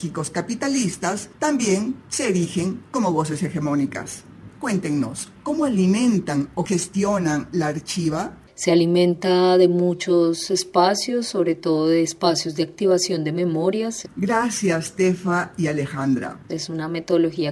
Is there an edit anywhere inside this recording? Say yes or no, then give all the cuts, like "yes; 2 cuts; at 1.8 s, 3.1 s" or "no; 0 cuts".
yes; 2 cuts; at 14.0 s, 16.5 s